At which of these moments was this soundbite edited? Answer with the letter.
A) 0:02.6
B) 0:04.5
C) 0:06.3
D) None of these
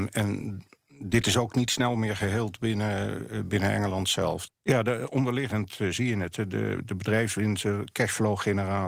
B